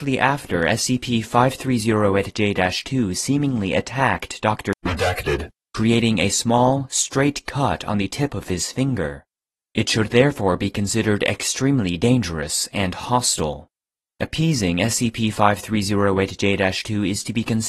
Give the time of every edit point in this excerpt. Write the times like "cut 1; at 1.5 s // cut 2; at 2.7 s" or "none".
none